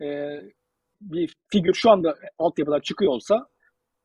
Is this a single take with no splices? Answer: no; 1 cut; at 0.9 s

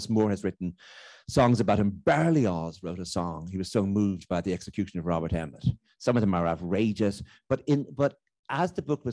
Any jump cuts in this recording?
yes; 1 cut; at 6.0 s

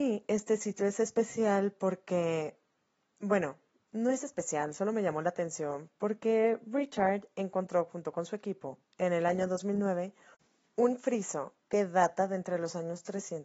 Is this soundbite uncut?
yes; 0 cuts

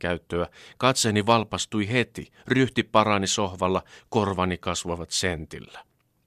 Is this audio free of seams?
yes; 0 cuts

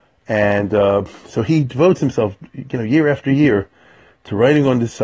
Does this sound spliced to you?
no; 0 cuts

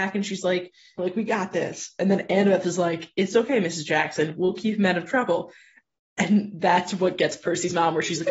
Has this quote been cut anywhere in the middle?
yes; 1 cut; at 1.0 s

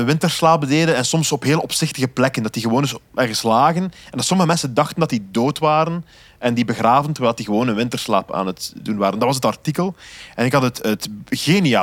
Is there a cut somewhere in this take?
yes; 1 cut; at 3.1 s

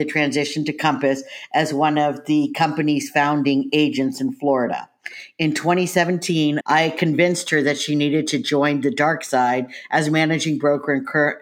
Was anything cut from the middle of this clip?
yes; 1 cut; at 6.6 s

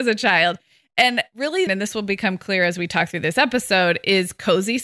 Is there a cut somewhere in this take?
yes; 1 cut; at 1.7 s

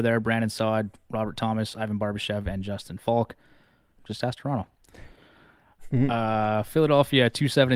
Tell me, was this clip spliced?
yes; 1 cut; at 4.0 s

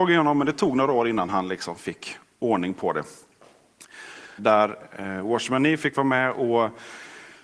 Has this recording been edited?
yes; 1 cut; at 4.4 s

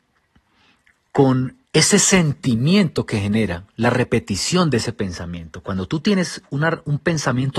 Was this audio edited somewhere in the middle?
yes; 1 cut; at 1.6 s

